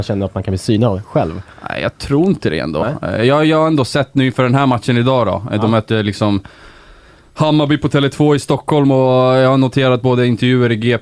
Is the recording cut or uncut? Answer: uncut